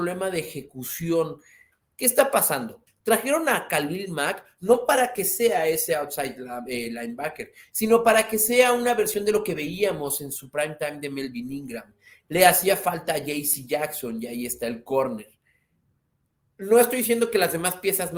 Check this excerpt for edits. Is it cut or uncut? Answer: cut